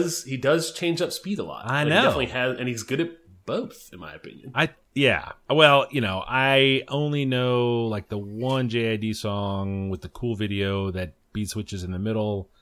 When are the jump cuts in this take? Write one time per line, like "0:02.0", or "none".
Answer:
none